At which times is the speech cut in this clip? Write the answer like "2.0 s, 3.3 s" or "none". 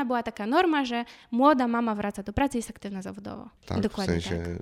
3.6 s